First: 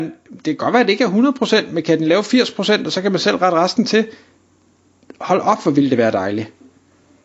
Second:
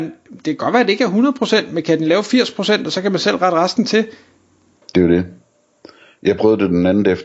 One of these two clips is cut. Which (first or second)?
second